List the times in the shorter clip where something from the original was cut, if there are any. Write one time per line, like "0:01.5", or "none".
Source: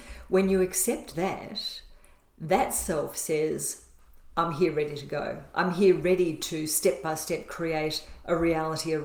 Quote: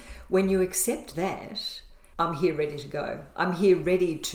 0:02.1